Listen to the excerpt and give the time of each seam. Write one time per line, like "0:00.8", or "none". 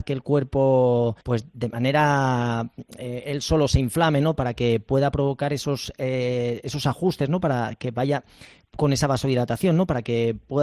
0:01.2